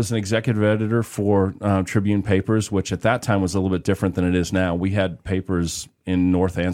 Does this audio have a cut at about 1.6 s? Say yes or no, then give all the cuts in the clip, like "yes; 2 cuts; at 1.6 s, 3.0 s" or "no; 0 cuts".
no; 0 cuts